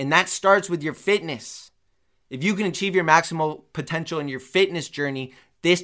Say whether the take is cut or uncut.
uncut